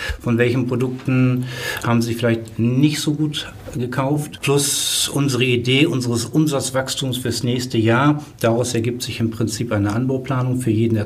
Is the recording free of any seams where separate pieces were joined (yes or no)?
yes